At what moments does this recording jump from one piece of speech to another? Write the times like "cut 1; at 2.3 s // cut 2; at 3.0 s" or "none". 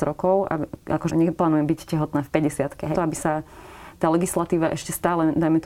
cut 1; at 1.1 s // cut 2; at 2.9 s